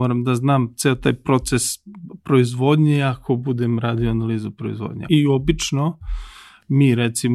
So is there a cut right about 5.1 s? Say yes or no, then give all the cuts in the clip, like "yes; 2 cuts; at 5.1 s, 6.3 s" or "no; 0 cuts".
yes; 1 cut; at 5.1 s